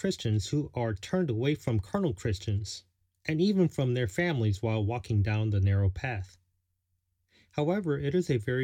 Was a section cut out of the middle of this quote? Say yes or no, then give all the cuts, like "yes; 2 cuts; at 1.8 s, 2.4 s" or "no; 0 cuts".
no; 0 cuts